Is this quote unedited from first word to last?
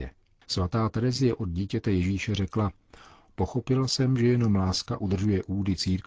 yes; 0 cuts

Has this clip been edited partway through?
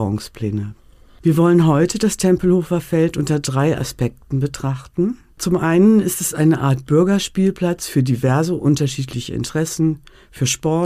no; 0 cuts

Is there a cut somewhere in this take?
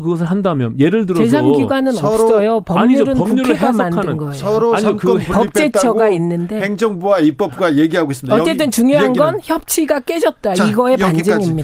no; 0 cuts

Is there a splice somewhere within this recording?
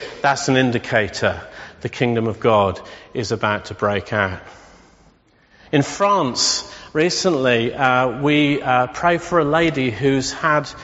no; 0 cuts

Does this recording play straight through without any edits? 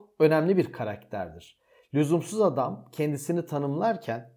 yes; 0 cuts

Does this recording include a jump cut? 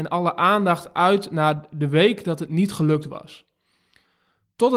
no; 0 cuts

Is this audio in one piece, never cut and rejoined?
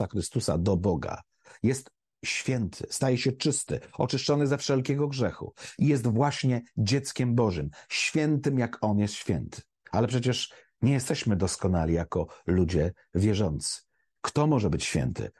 yes; 0 cuts

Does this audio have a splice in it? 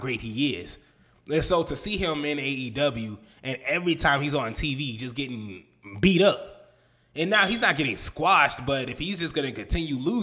no; 0 cuts

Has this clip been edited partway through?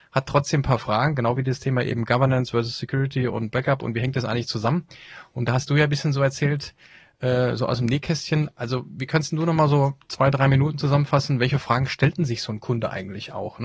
no; 0 cuts

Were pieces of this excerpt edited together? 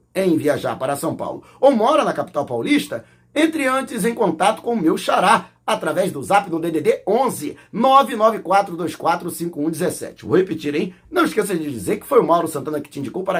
yes; 1 cut; at 11.0 s

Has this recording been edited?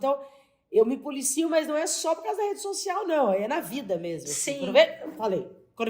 no; 0 cuts

